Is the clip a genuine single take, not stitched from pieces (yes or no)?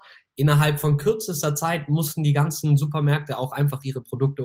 yes